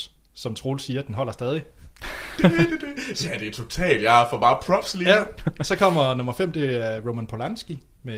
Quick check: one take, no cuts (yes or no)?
yes